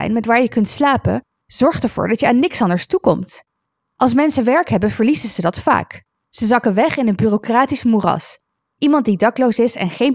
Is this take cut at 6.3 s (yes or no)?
no